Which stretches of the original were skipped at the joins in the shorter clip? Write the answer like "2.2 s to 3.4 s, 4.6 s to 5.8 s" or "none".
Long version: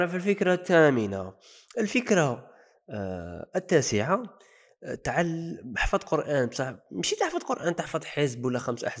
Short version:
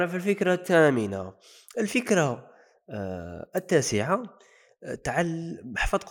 none

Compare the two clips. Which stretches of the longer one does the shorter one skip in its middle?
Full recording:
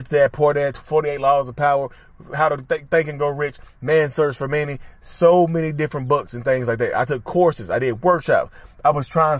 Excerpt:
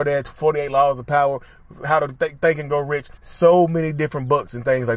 3.7 s to 5.0 s

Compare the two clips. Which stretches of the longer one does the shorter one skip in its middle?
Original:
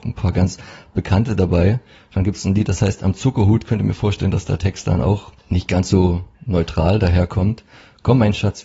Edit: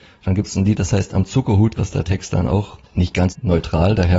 3.7 s to 4.3 s, 5.8 s to 6.3 s

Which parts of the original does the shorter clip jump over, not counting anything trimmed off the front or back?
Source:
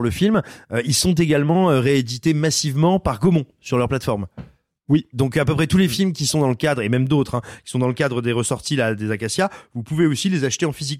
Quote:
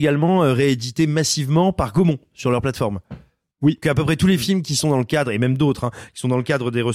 5.1 s to 5.3 s

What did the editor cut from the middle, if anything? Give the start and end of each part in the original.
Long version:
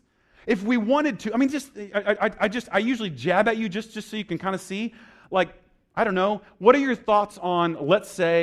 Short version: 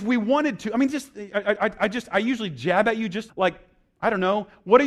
3.9 s to 5.2 s

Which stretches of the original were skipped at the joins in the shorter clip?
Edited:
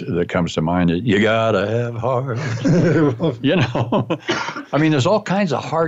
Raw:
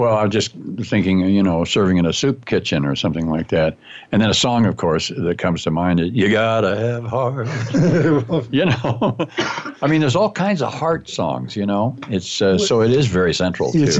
none

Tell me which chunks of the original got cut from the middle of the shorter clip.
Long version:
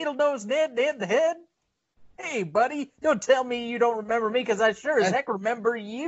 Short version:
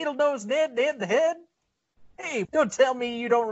2.4 s to 2.9 s

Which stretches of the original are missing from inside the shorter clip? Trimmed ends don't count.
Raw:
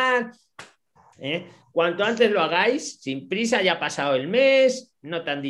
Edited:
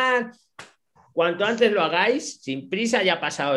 1.1 s to 1.6 s

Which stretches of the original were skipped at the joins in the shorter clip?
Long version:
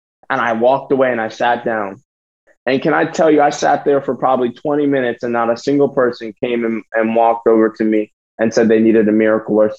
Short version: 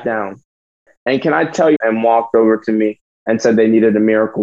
3.4 s to 6.9 s

